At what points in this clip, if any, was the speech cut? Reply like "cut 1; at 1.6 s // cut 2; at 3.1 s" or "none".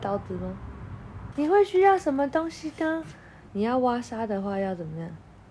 cut 1; at 1.3 s // cut 2; at 3.5 s

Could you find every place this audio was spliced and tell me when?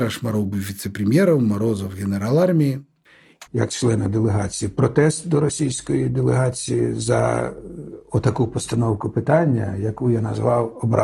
cut 1; at 3.5 s

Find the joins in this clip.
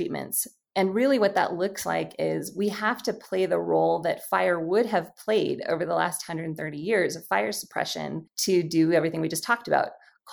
none

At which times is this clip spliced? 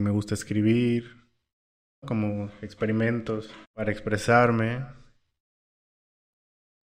cut 1; at 2.0 s // cut 2; at 3.6 s

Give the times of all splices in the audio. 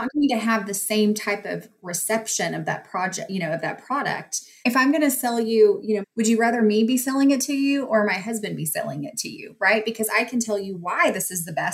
cut 1; at 4.6 s // cut 2; at 6.0 s

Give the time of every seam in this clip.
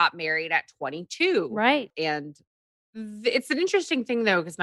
cut 1; at 1.9 s

